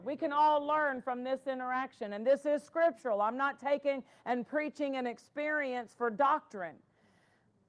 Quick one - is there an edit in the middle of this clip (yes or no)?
no